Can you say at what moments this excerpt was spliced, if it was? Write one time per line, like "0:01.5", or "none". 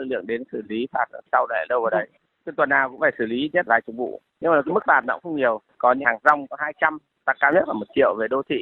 0:03.7